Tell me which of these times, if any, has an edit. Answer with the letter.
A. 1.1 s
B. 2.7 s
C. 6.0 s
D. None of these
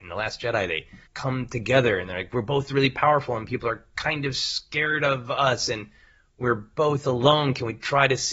A